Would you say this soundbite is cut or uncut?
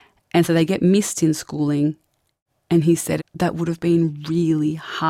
cut